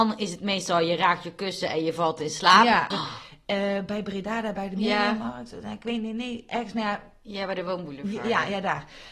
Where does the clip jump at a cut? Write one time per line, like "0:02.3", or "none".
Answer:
0:02.9